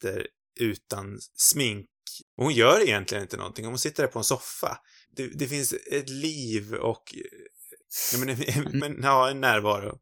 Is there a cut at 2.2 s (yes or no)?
no